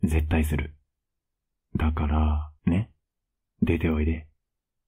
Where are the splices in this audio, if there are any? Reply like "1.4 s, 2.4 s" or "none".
2.6 s